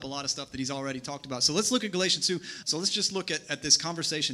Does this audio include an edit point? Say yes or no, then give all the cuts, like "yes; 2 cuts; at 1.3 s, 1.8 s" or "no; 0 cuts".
yes; 1 cut; at 2.6 s